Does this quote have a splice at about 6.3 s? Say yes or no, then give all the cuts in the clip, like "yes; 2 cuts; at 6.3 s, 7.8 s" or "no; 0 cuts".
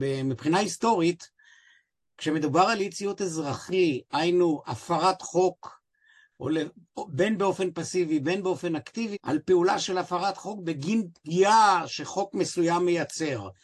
no; 1 cut; at 9.1 s